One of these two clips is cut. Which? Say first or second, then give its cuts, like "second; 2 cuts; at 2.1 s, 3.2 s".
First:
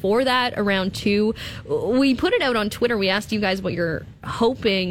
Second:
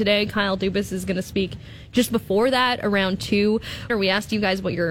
second; 1 cut; at 3.9 s